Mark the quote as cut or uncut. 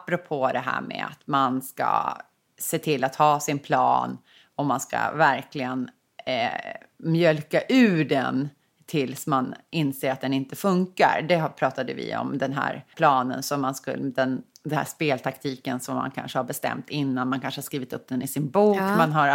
cut